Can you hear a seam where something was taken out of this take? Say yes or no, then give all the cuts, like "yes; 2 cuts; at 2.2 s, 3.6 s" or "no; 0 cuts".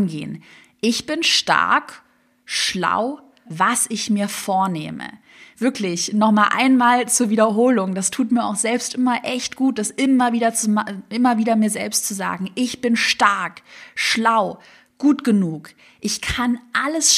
yes; 1 cut; at 3.5 s